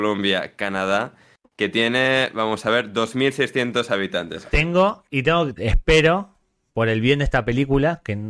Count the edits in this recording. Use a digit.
2